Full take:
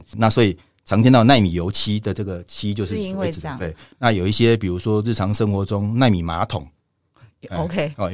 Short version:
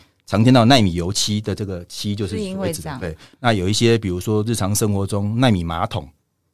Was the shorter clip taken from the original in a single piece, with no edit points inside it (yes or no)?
yes